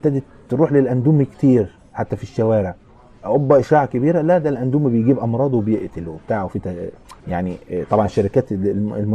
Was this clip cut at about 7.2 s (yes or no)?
yes